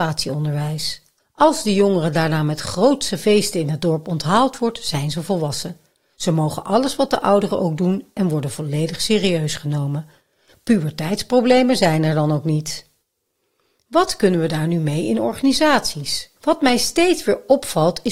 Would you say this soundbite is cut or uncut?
cut